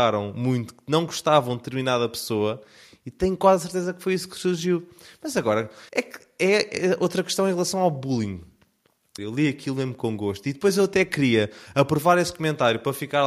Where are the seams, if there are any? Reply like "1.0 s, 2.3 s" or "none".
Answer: 5.9 s, 9.2 s